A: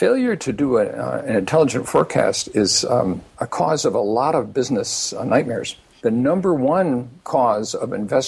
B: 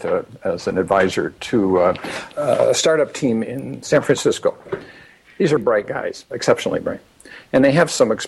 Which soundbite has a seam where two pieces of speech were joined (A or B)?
B